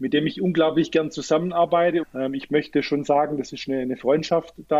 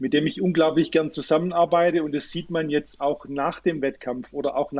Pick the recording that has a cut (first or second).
first